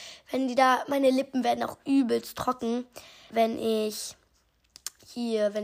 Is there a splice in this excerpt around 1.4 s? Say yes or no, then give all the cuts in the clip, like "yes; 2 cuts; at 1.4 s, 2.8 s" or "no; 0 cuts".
no; 1 cut; at 3.3 s